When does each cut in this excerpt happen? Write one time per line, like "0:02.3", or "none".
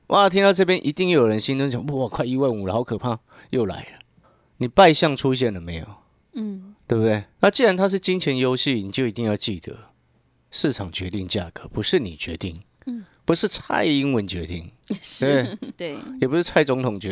0:07.4
0:15.7